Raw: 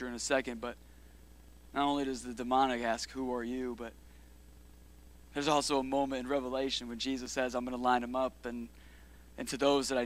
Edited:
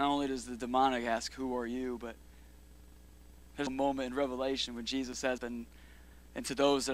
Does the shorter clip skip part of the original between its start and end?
yes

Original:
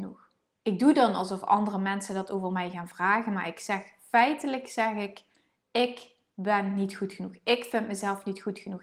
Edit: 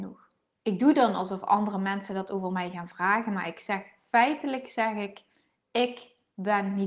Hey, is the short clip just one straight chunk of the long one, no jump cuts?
yes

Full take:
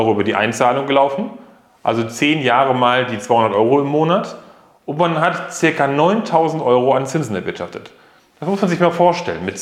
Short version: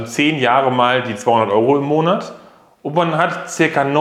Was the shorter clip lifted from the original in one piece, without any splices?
yes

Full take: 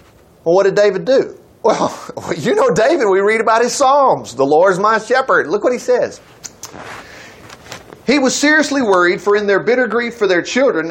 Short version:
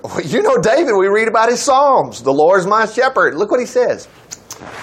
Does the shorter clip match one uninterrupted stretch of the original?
yes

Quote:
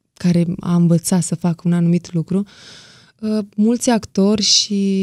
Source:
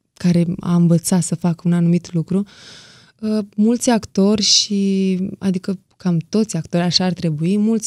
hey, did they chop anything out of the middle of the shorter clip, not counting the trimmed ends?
no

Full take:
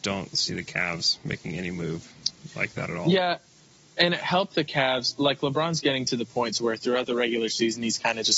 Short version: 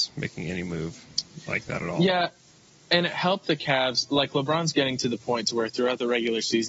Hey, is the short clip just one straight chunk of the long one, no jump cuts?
yes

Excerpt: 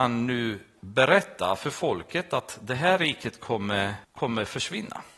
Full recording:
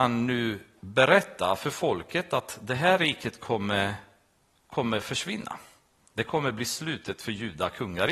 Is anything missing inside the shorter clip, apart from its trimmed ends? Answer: yes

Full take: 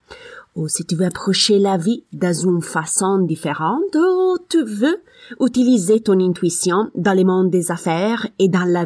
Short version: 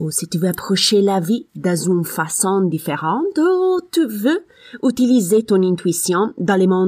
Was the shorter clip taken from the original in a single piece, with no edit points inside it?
yes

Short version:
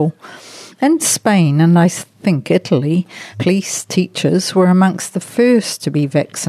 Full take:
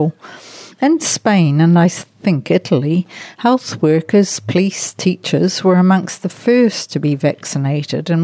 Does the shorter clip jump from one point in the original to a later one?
yes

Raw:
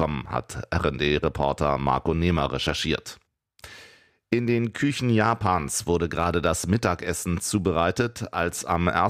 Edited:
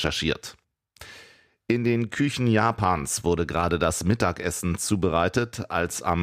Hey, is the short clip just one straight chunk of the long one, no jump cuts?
yes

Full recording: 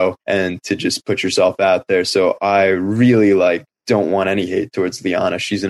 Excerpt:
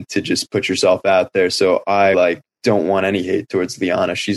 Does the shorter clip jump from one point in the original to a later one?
yes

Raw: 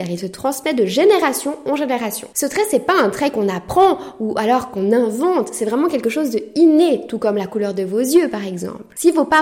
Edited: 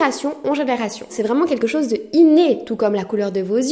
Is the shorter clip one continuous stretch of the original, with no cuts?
no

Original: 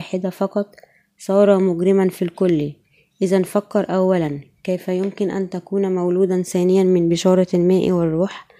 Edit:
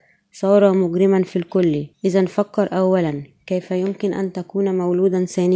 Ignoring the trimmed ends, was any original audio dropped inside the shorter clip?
yes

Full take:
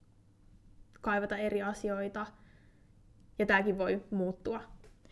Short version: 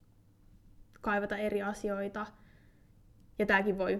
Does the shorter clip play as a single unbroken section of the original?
yes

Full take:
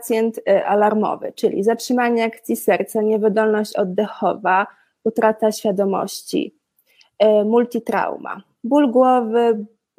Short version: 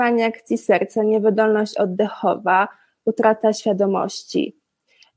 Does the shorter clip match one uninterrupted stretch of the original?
yes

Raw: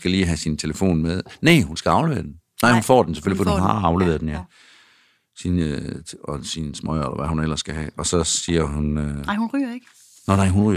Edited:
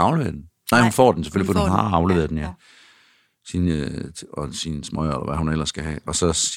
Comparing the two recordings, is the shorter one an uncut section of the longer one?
yes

